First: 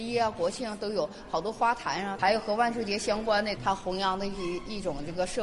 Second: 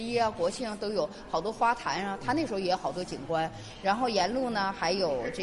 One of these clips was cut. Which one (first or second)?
first